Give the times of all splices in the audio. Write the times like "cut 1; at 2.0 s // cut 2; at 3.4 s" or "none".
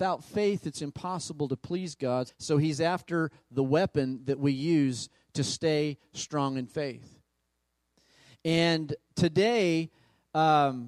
cut 1; at 2.3 s // cut 2; at 8.3 s